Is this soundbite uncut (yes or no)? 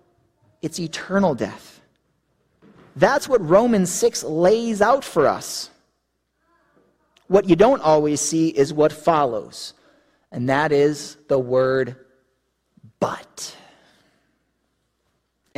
yes